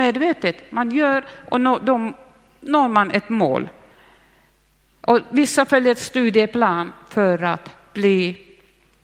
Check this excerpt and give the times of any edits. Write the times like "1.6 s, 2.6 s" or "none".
none